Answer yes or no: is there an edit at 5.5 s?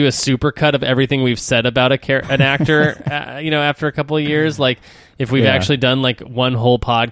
no